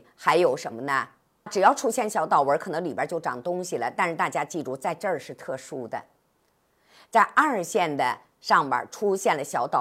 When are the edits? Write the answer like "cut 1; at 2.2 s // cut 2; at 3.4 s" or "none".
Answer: cut 1; at 1.5 s